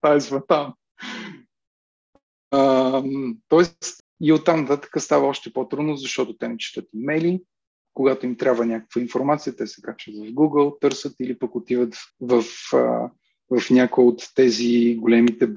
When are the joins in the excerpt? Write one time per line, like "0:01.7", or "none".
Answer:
0:04.0
0:12.1